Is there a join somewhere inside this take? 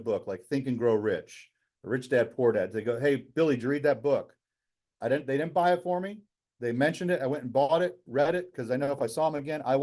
no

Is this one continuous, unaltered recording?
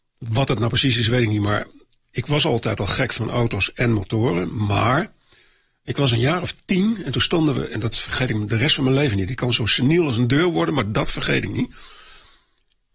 yes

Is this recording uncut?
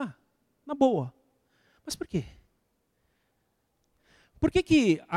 yes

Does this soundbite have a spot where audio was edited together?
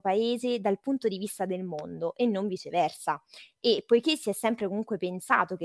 no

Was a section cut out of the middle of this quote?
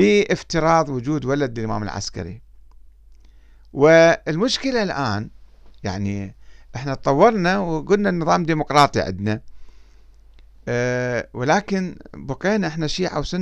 no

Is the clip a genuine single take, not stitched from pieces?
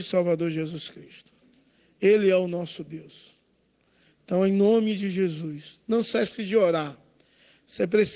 yes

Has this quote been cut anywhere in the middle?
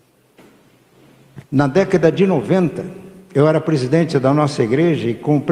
yes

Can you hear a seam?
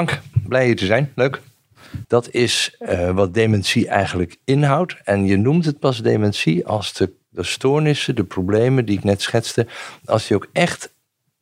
yes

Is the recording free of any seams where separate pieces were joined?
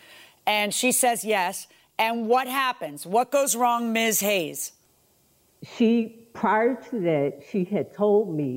yes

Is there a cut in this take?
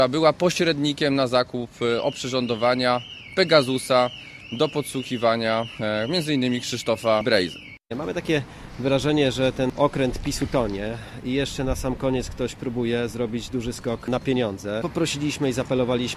yes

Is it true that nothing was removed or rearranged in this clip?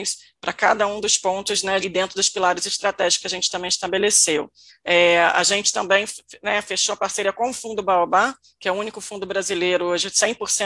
no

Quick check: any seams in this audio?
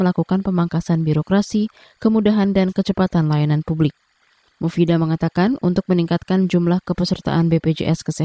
no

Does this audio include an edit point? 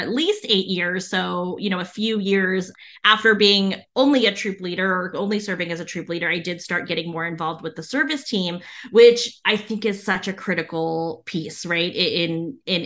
no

